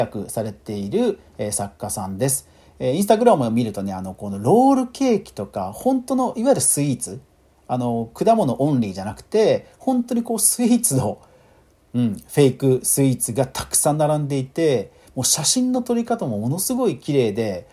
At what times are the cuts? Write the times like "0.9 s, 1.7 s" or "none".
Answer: none